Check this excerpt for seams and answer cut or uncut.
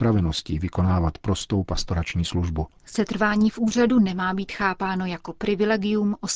cut